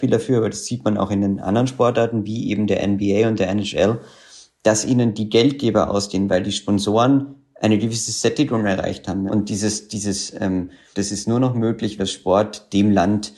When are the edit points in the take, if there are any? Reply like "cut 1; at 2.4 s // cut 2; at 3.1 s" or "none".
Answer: cut 1; at 9.3 s // cut 2; at 10.9 s // cut 3; at 12.0 s